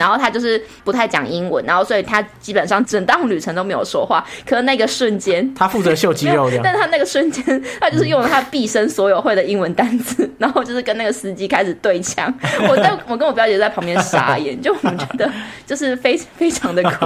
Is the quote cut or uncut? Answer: cut